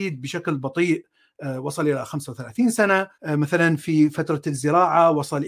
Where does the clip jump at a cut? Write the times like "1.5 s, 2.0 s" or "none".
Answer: 3.1 s